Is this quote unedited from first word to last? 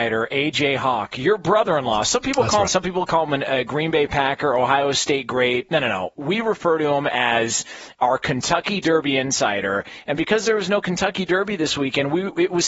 no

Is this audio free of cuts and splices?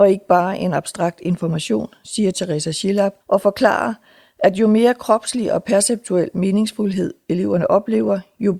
no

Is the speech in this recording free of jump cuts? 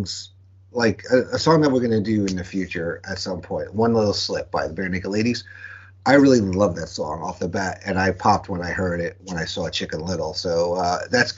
yes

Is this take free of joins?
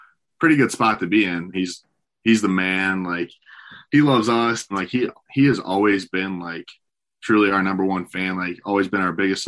no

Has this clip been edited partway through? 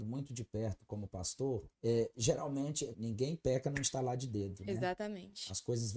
yes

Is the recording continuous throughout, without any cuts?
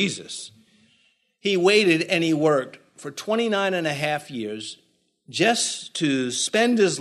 yes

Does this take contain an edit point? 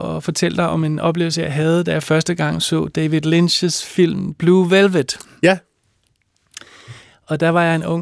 no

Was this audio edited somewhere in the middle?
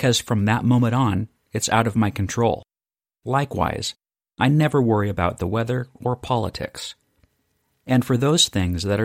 no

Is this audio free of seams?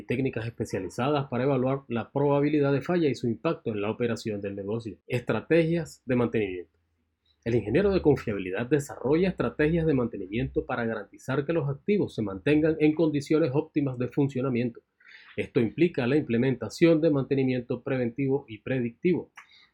no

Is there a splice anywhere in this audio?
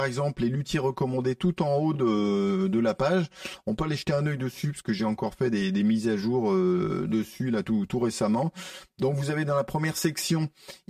no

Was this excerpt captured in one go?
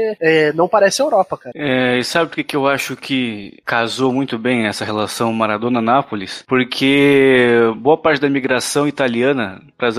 no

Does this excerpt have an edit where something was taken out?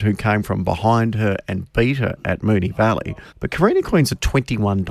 yes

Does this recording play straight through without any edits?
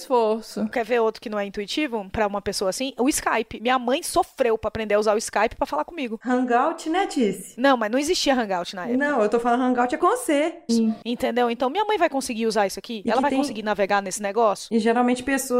no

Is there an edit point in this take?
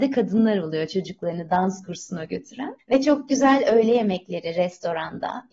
yes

